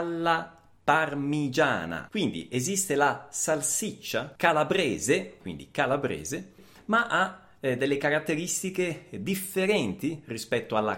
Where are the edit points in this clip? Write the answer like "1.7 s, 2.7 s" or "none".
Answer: 2.1 s, 5.4 s